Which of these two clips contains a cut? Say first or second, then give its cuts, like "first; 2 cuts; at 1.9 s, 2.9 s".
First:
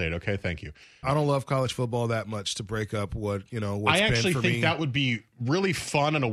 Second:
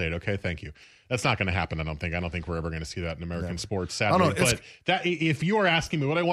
first; 1 cut; at 1.0 s